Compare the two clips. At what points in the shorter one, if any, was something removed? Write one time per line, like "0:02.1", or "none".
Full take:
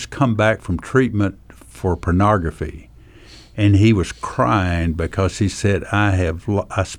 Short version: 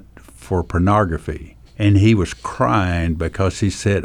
0:01.7